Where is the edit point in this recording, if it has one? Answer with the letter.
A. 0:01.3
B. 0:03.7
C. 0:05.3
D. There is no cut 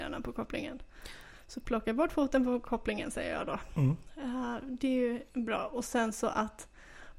C